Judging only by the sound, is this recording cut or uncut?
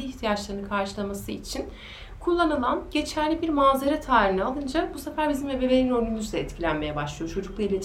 uncut